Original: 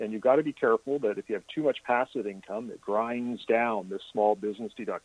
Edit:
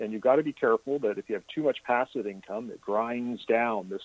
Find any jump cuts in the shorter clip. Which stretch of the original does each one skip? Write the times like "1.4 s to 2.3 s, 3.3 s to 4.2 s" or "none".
none